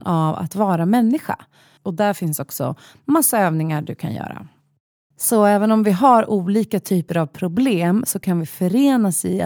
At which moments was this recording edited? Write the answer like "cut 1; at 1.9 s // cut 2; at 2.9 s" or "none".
cut 1; at 1.8 s // cut 2; at 5.1 s